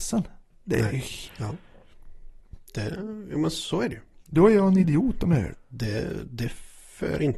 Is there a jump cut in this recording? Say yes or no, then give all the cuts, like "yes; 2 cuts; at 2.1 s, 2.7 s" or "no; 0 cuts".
yes; 2 cuts; at 1.3 s, 5.5 s